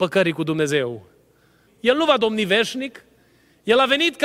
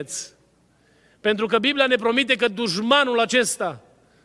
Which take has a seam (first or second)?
first